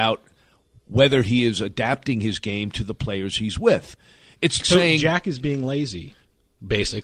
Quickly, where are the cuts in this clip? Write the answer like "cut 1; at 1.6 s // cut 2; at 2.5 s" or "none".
cut 1; at 4.6 s